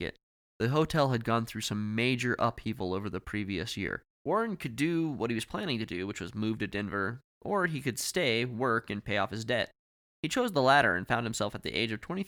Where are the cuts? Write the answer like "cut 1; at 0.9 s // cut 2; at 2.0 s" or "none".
cut 1; at 4.1 s